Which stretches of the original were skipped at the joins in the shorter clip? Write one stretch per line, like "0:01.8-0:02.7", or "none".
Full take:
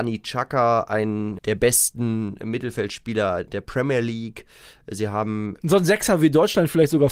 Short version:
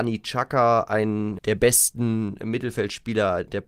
none